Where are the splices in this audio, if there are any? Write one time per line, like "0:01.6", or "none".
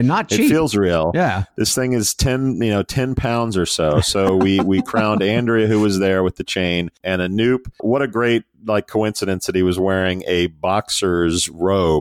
none